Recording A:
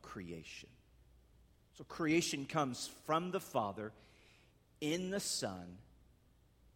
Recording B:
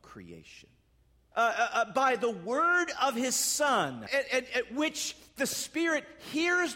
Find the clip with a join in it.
B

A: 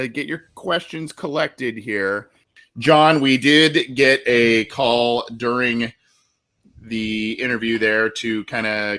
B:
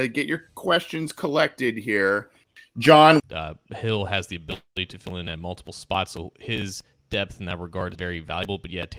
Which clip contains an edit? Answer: B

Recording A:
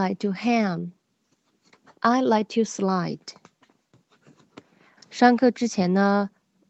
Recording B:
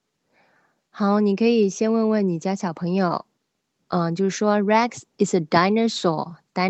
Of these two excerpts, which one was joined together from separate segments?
A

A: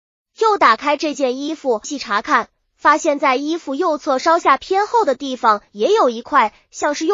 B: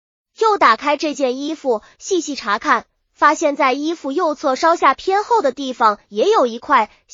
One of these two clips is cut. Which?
A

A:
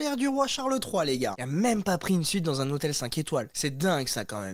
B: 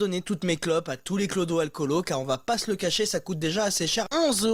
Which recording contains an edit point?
A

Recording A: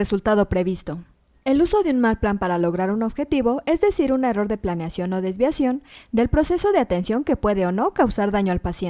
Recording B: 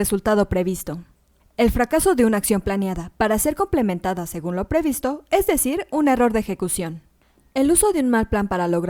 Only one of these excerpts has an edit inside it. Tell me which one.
A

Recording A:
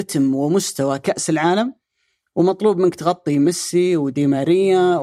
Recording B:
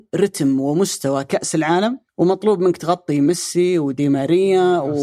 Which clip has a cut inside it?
B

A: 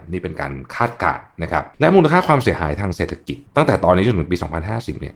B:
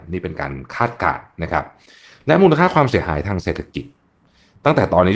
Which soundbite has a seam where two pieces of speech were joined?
A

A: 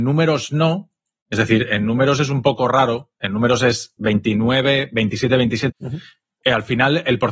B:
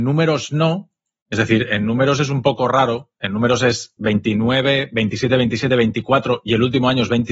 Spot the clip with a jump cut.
A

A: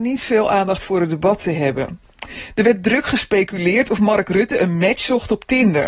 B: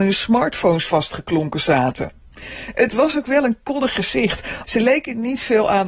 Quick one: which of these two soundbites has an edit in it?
B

